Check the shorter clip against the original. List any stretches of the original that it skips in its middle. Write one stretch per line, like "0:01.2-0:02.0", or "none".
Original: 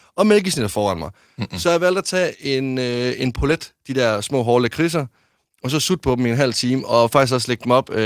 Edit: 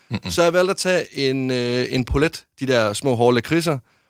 none